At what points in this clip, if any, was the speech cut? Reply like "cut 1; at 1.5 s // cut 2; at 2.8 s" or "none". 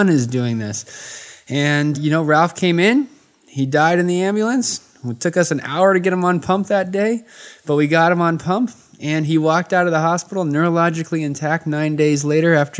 cut 1; at 1.9 s